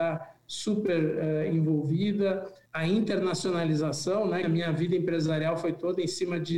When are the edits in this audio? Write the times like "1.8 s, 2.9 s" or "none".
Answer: 2.7 s, 4.4 s